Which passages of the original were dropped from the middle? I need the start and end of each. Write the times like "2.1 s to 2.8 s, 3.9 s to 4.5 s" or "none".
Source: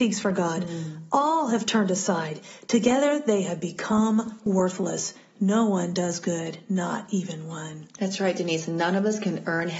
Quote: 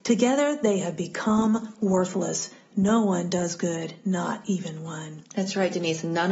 none